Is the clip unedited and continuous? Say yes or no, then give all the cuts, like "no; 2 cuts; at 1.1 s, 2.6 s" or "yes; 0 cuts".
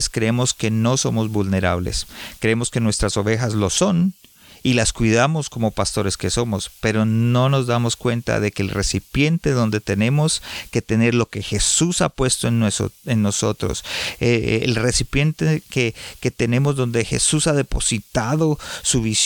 yes; 0 cuts